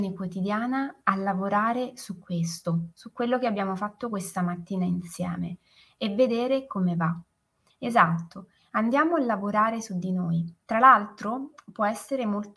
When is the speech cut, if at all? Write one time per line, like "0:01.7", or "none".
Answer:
0:07.7
0:10.6

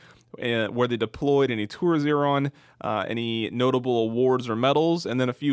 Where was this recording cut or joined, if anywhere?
none

